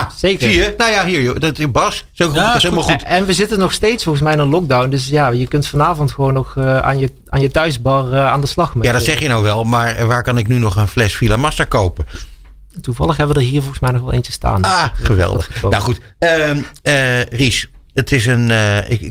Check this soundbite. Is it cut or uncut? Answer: uncut